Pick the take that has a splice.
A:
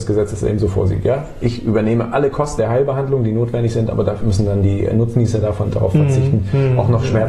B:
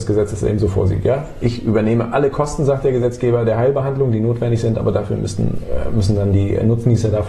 A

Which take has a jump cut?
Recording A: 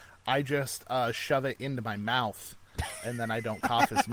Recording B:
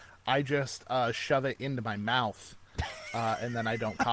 A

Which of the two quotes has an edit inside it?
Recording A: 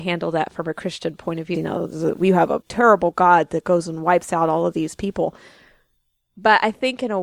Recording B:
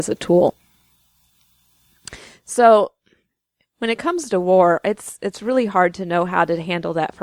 A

